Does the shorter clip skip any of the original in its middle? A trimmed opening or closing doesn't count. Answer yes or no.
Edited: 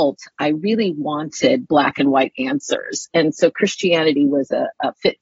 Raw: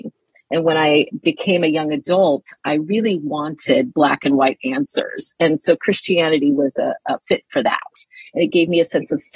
no